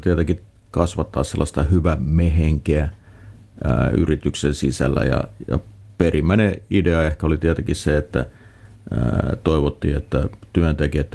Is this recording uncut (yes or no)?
yes